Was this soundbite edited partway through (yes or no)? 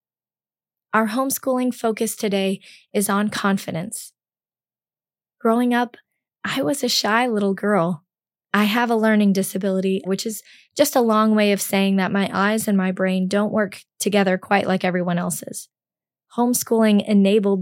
yes